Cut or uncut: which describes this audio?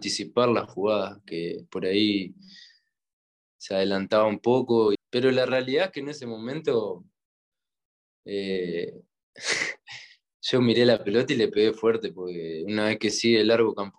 cut